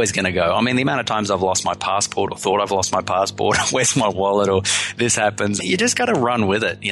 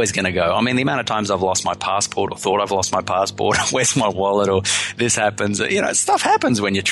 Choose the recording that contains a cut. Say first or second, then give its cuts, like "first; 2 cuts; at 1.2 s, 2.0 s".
first; 1 cut; at 5.6 s